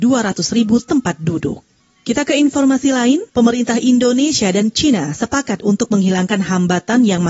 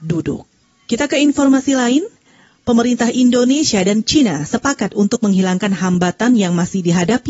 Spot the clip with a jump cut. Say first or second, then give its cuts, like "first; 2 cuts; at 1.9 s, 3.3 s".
first; 1 cut; at 3.3 s